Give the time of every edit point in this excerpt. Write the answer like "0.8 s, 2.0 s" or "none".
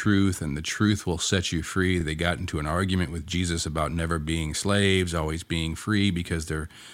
none

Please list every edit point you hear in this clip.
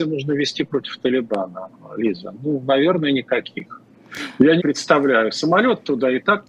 4.6 s

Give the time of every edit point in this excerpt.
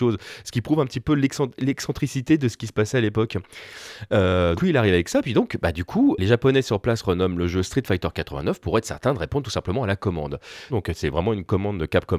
4.6 s, 10.7 s

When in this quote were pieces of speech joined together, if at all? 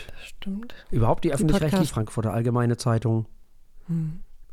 1.9 s

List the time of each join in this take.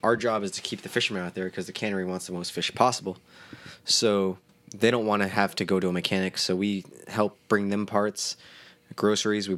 none

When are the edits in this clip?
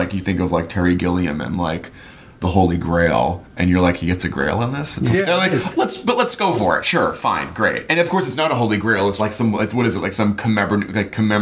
5.1 s, 9.2 s

